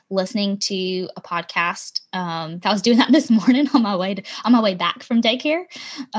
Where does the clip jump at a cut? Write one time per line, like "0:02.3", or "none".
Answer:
0:02.6